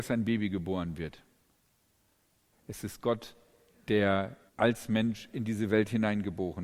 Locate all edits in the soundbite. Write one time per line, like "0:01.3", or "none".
0:02.5
0:04.5